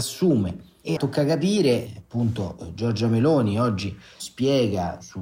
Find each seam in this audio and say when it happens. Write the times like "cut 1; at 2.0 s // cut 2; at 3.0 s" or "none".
cut 1; at 1.0 s